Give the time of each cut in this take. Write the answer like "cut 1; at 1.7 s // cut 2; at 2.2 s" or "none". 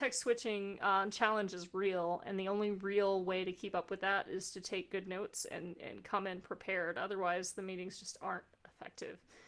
none